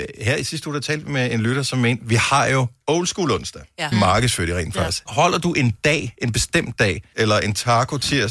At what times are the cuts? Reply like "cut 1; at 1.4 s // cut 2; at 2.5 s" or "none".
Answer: cut 1; at 3.9 s // cut 2; at 5.1 s // cut 3; at 7.1 s